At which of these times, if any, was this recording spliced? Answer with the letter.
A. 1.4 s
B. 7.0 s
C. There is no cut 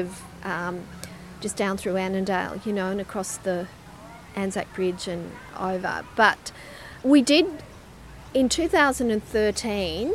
B